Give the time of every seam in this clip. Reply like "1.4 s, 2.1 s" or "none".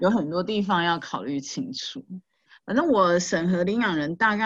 none